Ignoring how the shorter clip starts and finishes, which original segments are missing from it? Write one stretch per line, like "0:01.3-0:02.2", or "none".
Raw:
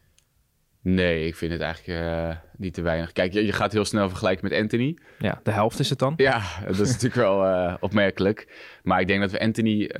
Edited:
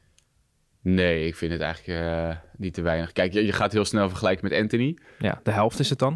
none